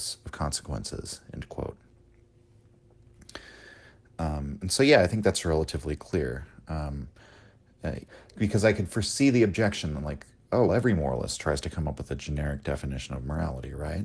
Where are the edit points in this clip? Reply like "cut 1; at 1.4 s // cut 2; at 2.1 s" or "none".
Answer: cut 1; at 8.0 s // cut 2; at 10.7 s